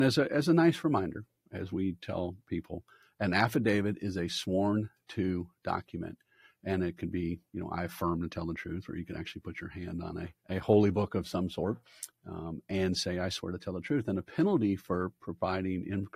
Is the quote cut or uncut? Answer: cut